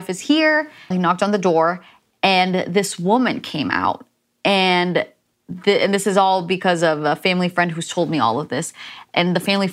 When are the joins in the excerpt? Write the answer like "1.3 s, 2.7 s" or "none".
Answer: 0.9 s